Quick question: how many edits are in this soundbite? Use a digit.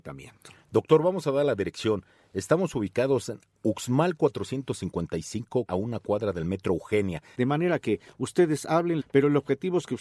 3